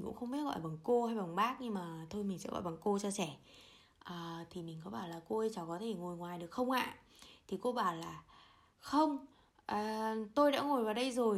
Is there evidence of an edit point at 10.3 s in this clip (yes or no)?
no